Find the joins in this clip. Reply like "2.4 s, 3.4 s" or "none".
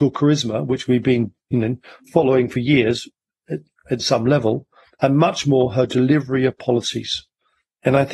none